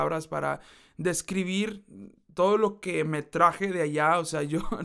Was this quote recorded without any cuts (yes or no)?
yes